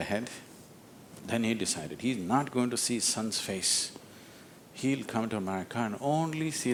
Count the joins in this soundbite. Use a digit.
1